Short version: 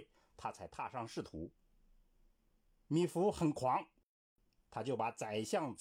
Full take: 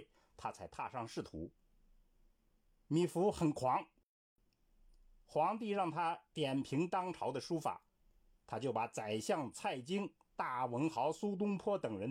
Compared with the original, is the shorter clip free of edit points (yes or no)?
no